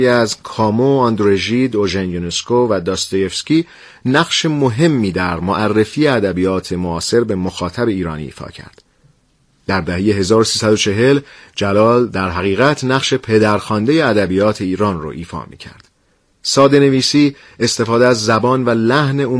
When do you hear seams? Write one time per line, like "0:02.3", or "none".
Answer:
none